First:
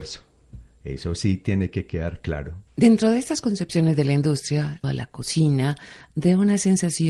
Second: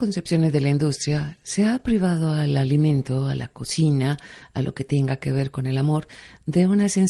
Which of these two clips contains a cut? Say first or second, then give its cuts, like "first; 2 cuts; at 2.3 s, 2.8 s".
first; 3 cuts; at 2.7 s, 4.8 s, 6.1 s